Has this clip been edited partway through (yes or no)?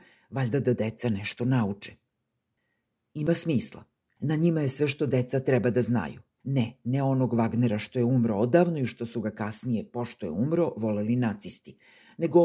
yes